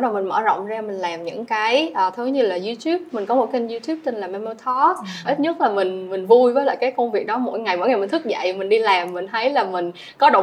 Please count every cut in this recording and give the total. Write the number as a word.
one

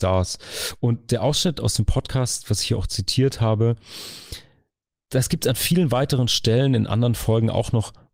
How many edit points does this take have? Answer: zero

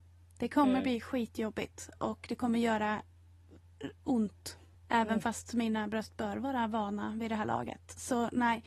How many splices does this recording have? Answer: zero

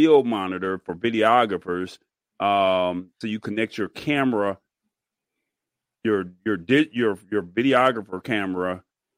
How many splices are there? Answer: zero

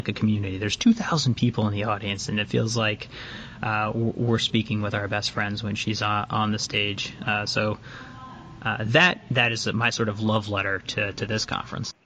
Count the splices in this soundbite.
zero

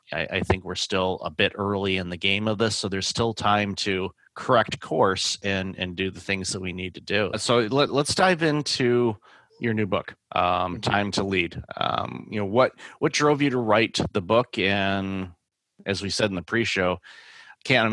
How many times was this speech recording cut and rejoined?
zero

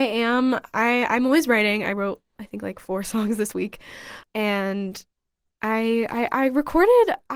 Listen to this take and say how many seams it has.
one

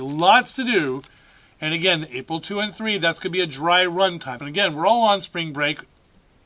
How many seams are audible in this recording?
one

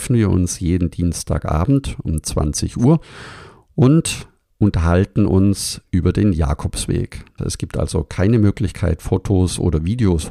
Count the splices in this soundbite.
one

